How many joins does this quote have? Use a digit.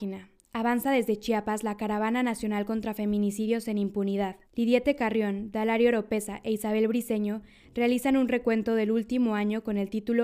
1